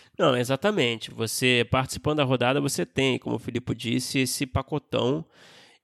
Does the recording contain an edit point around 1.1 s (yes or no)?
no